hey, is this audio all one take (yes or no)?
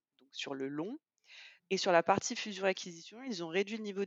no